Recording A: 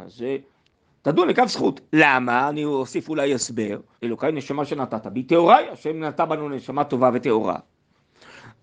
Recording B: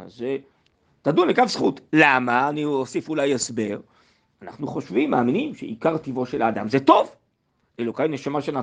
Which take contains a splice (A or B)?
A